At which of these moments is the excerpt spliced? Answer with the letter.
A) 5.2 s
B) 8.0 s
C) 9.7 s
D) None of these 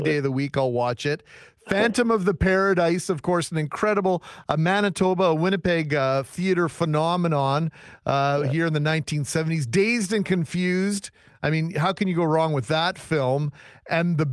D